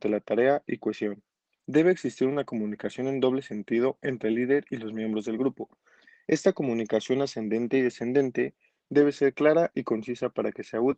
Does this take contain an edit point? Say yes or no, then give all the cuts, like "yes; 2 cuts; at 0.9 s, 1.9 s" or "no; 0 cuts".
yes; 1 cut; at 1.5 s